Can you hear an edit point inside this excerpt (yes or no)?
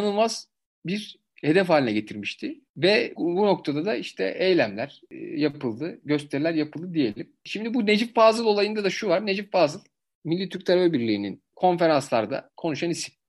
yes